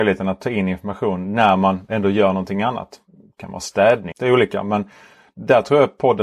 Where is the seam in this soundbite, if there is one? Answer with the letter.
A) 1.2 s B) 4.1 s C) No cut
B